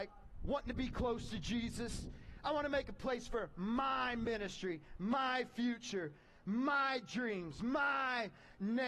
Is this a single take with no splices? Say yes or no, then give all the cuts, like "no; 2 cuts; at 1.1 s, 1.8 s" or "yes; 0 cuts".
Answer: yes; 0 cuts